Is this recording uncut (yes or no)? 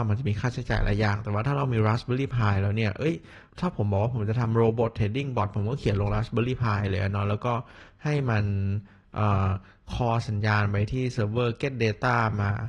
no